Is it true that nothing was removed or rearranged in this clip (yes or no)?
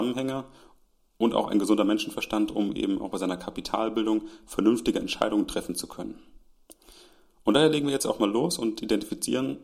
yes